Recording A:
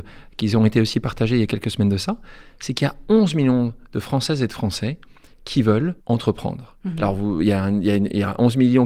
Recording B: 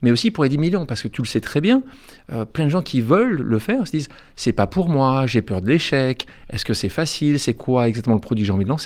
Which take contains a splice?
A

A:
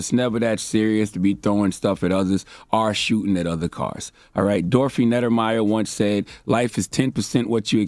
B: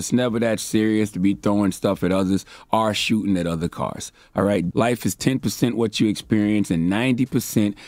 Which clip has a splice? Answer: B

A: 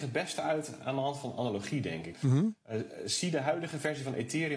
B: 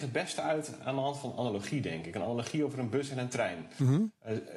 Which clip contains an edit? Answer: A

